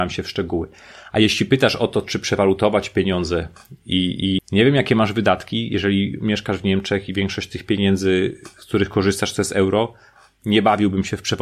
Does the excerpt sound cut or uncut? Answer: cut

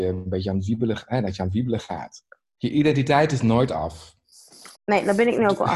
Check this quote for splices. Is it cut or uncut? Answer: cut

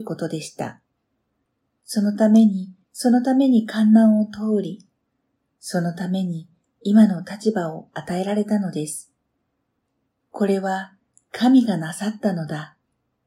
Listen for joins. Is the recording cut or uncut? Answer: cut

